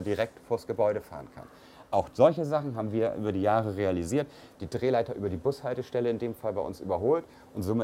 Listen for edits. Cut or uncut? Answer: cut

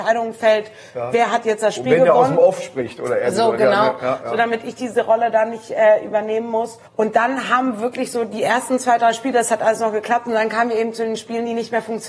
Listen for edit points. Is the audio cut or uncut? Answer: cut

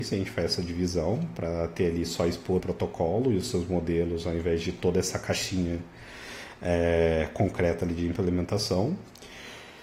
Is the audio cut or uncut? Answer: cut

